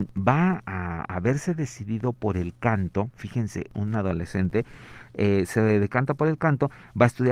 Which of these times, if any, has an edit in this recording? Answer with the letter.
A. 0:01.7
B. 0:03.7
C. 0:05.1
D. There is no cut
B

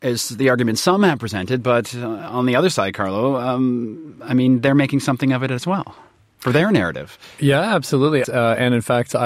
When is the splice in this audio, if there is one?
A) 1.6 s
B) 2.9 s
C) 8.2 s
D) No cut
C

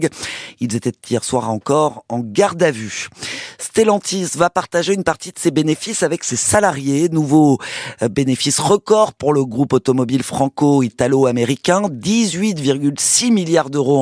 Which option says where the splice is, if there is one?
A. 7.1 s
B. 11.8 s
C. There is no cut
C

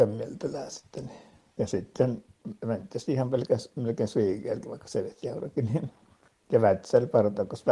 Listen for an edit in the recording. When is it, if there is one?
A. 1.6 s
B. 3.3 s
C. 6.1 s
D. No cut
D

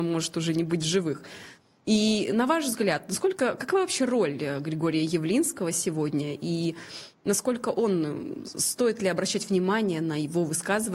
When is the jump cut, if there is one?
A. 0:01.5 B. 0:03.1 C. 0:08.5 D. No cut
D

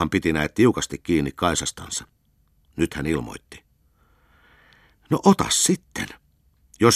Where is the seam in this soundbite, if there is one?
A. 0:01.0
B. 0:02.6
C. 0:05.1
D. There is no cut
D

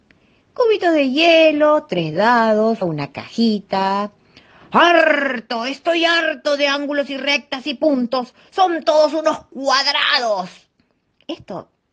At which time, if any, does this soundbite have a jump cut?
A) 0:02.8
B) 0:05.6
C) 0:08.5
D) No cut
A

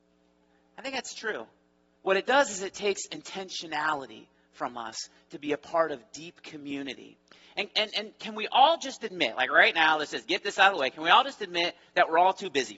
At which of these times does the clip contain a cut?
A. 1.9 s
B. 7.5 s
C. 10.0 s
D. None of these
A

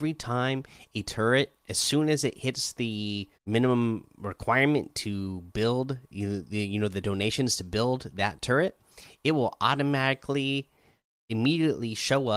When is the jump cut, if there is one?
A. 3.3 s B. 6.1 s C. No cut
A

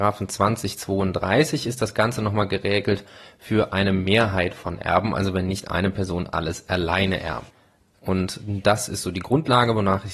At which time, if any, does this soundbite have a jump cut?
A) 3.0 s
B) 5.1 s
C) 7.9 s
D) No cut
C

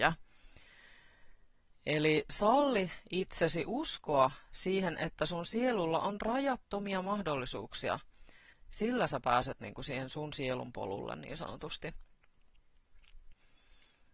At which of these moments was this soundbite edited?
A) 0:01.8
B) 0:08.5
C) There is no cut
B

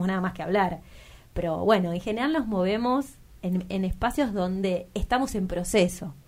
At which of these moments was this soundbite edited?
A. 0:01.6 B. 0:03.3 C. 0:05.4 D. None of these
D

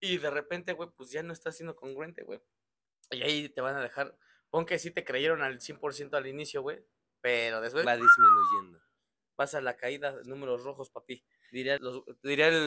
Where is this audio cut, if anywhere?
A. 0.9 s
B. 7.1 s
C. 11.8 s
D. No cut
C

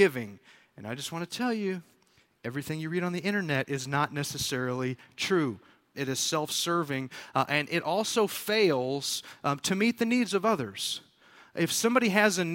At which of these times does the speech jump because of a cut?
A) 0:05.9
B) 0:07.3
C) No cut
A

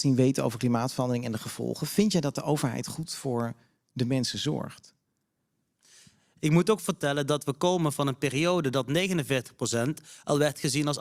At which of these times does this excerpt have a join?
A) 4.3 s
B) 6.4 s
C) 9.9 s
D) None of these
B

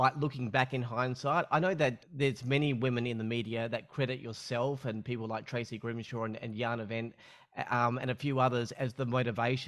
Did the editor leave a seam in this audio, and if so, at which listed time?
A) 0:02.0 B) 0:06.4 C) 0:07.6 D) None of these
A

